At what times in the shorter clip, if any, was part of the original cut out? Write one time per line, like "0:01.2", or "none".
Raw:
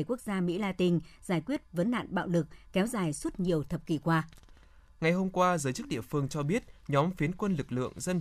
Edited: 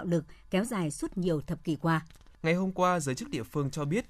0:02.3